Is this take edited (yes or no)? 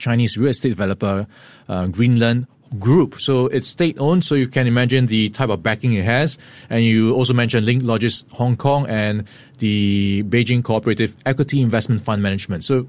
no